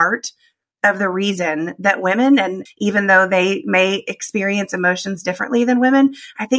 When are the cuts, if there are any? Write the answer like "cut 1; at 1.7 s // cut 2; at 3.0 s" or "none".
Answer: cut 1; at 2.7 s